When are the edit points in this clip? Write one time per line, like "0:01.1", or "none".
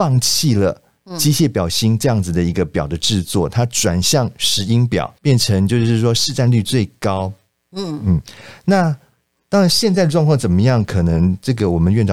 0:05.2